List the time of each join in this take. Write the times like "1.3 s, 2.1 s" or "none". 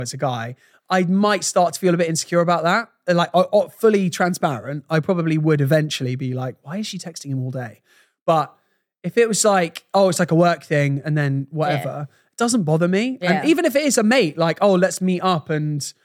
none